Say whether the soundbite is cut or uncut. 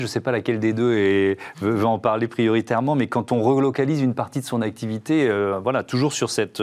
uncut